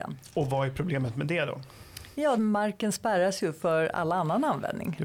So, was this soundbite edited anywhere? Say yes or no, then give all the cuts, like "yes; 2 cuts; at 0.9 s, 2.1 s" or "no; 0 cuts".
yes; 1 cut; at 2.4 s